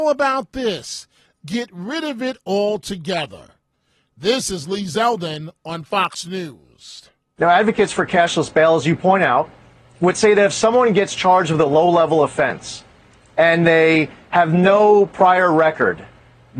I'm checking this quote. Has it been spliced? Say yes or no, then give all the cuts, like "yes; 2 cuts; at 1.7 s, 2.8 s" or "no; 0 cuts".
no; 0 cuts